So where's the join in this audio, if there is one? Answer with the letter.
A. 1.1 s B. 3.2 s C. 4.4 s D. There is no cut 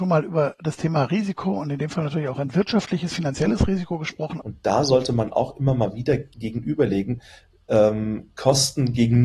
C